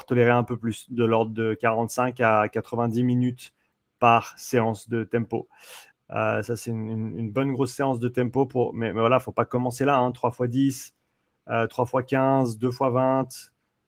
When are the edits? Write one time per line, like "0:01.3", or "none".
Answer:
0:05.9